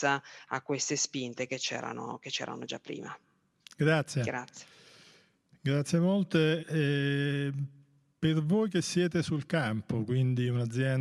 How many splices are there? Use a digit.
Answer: 1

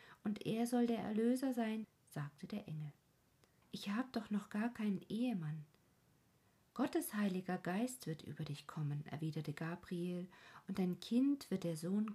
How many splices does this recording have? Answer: 2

